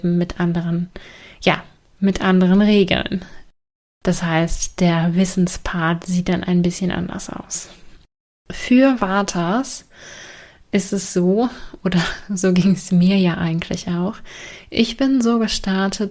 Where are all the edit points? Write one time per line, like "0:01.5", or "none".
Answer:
none